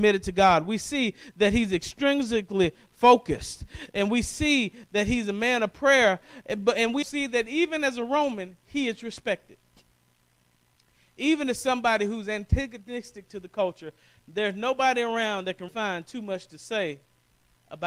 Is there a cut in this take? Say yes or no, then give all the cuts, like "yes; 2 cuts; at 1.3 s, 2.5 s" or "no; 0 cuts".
yes; 2 cuts; at 7.0 s, 15.7 s